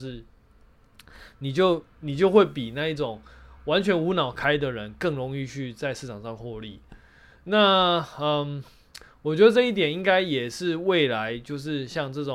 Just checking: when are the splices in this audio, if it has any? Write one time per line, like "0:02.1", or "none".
none